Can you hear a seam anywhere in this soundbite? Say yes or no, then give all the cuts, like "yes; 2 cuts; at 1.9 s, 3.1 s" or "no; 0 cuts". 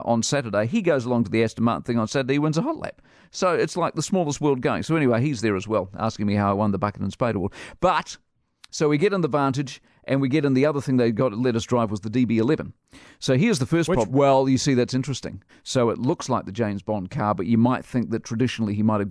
yes; 2 cuts; at 14.1 s, 15.5 s